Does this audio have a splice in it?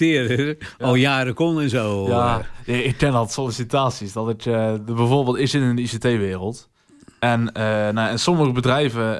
no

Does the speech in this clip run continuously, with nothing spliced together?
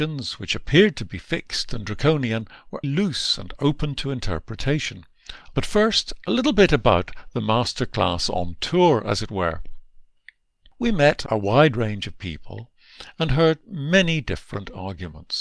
no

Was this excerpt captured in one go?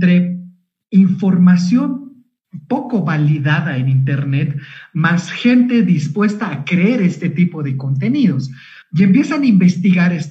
no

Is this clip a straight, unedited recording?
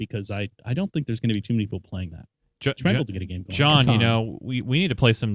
yes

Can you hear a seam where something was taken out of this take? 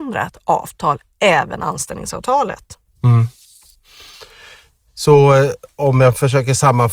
no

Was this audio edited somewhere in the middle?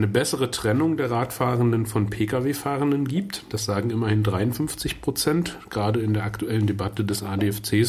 no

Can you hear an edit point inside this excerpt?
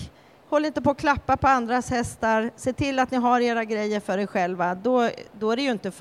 no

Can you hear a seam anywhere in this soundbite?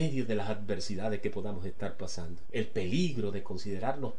yes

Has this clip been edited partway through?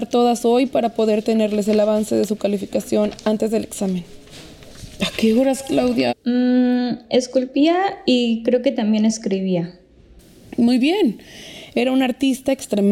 yes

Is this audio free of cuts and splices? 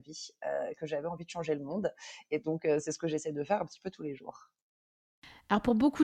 yes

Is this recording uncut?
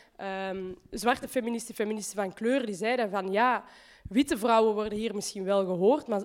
yes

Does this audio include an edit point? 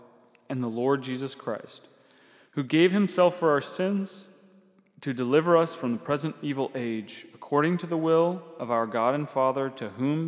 no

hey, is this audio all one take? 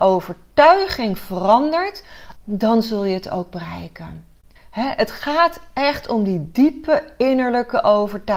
no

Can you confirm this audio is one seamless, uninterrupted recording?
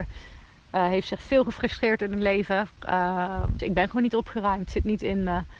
no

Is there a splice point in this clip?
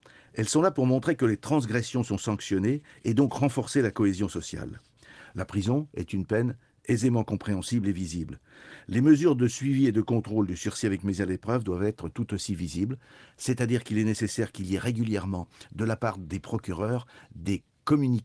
no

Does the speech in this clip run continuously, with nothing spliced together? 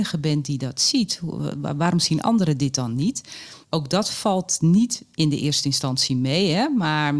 no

